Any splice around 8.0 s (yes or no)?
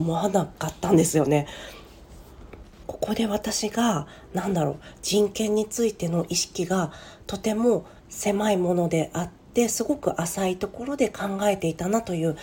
yes